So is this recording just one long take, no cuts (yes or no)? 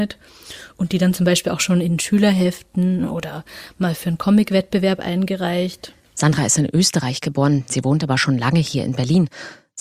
yes